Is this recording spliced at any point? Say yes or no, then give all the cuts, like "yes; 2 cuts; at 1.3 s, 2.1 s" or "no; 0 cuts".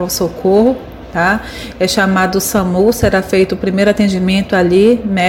yes; 1 cut; at 1.7 s